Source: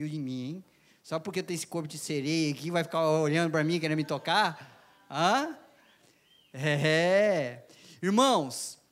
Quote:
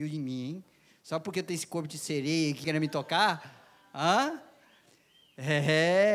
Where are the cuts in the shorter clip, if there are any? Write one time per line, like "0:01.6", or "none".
0:02.6